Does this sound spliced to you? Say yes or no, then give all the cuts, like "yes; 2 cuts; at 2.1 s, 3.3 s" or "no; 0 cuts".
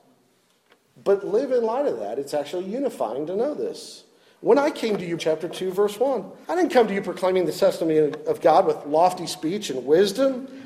yes; 2 cuts; at 5.2 s, 6.4 s